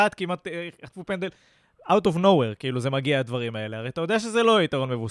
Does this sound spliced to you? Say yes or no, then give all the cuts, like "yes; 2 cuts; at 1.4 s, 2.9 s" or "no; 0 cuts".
no; 0 cuts